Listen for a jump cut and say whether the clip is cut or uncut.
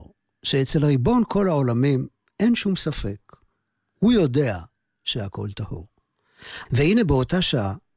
cut